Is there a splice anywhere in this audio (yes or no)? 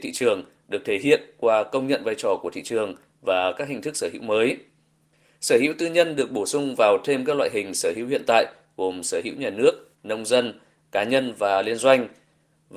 yes